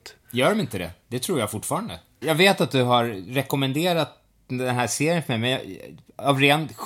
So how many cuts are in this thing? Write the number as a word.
one